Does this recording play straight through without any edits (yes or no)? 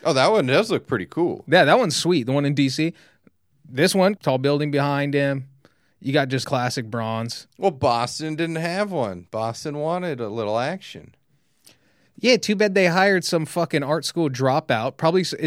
no